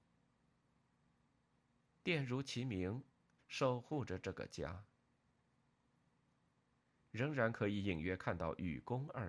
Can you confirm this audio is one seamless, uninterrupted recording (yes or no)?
no